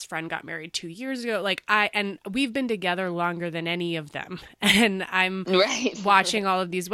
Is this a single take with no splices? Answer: yes; 0 cuts

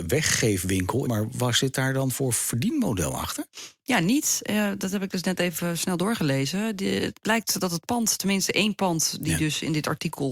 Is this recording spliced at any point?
yes; 1 cut; at 1.0 s

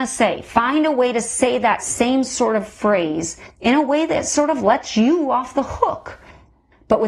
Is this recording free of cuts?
yes; 0 cuts

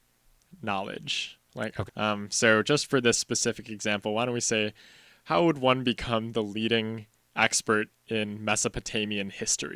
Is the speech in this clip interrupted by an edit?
yes; 1 cut; at 1.9 s

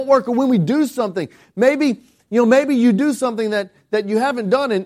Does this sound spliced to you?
no; 0 cuts

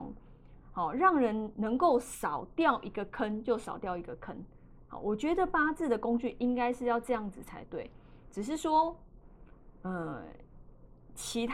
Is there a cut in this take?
no; 0 cuts

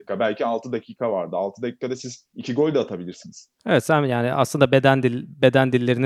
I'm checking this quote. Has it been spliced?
yes; 1 cut; at 3.6 s

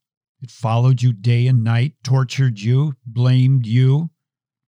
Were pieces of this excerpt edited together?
no; 0 cuts

